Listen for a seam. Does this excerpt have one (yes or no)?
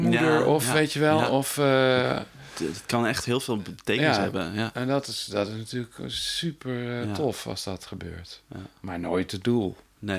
no